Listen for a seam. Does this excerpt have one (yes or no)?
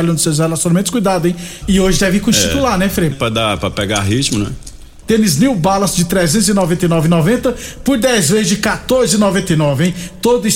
yes